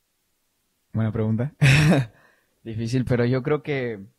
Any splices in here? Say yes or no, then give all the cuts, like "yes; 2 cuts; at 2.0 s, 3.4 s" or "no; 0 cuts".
no; 0 cuts